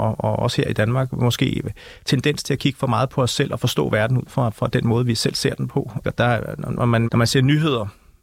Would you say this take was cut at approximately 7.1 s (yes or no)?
yes